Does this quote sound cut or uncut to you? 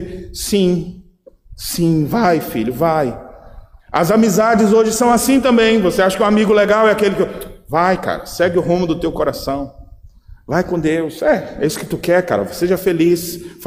uncut